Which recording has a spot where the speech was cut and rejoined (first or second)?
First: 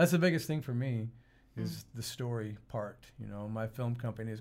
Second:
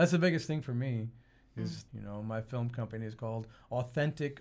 second